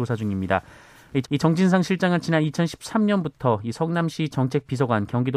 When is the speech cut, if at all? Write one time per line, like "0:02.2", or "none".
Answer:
0:01.2

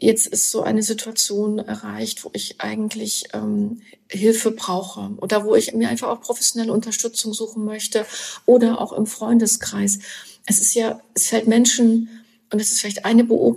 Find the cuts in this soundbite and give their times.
none

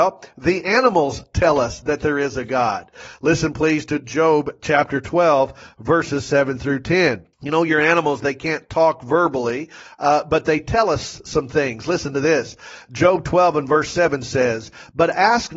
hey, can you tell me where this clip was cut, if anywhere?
0:07.3

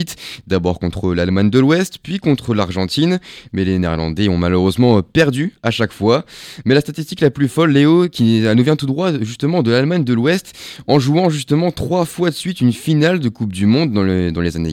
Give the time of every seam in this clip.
none

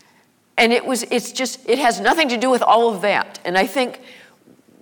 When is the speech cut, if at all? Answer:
none

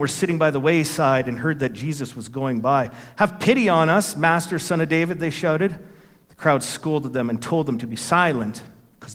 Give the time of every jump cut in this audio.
none

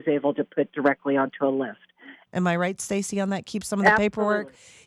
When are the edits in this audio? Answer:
0:02.3

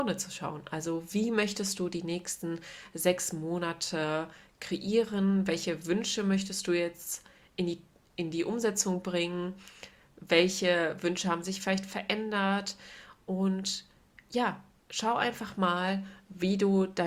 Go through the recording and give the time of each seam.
none

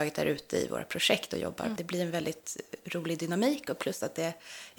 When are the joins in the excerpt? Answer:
0:01.8

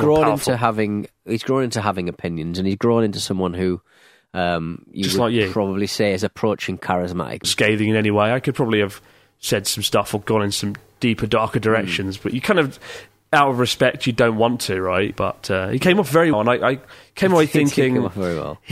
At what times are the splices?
0:07.4
0:15.1
0:16.3

